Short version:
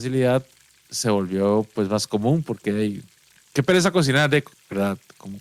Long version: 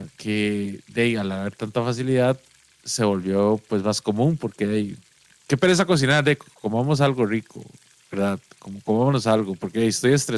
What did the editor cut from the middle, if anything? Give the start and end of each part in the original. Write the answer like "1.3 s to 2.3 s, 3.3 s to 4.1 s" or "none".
6.5 s to 7.9 s